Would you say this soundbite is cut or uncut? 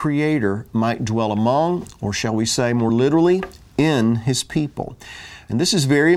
uncut